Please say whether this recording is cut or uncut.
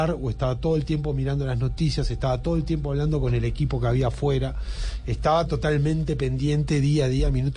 uncut